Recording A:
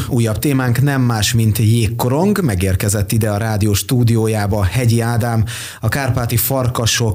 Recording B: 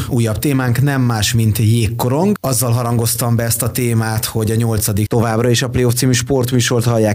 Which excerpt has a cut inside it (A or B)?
B